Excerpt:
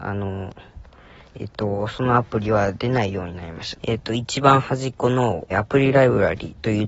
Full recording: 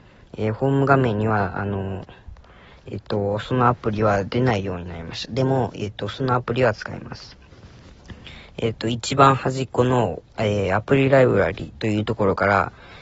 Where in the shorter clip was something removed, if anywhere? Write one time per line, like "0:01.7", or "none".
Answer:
0:03.7
0:05.5